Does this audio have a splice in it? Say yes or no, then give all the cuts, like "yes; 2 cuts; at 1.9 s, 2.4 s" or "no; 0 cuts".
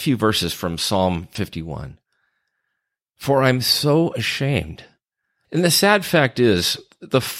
yes; 1 cut; at 5.5 s